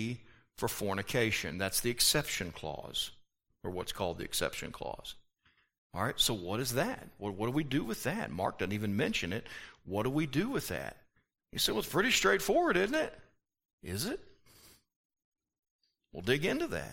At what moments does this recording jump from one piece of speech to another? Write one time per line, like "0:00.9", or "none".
none